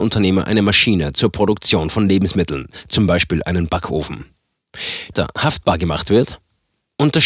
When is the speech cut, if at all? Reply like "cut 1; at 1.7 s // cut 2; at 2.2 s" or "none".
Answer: cut 1; at 5.1 s